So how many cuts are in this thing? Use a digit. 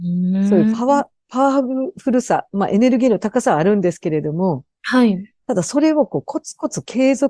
1